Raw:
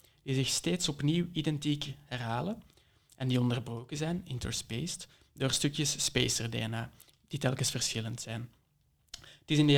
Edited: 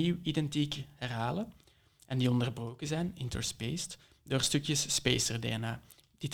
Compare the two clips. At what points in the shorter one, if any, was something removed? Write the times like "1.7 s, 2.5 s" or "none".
none